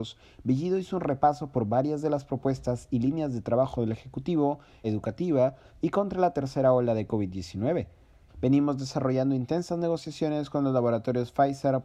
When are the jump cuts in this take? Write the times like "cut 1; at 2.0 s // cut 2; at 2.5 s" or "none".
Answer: cut 1; at 4.8 s // cut 2; at 8.3 s